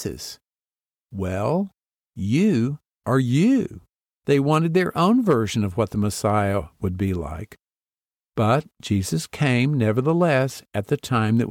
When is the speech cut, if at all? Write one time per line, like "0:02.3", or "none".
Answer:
0:04.2